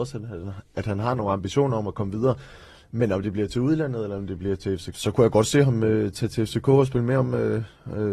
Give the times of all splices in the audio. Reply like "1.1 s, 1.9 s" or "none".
4.9 s